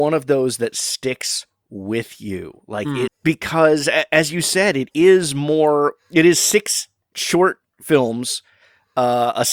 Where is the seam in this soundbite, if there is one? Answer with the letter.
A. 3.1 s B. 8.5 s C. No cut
A